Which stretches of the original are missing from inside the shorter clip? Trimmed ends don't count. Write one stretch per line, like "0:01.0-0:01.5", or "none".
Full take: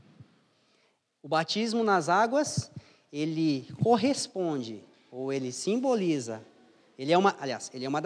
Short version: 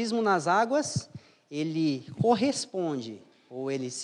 none